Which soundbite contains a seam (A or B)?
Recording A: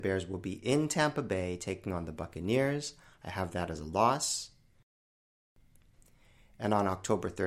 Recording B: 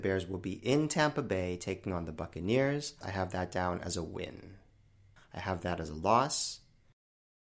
B